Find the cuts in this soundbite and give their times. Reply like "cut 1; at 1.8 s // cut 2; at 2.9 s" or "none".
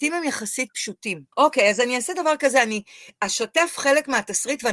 cut 1; at 1.3 s